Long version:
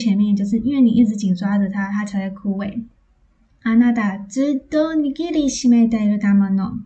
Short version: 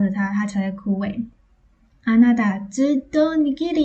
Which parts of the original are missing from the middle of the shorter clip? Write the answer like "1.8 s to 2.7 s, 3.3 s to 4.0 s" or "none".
none